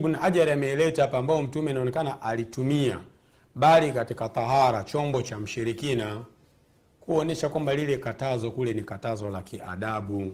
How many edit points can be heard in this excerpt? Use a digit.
0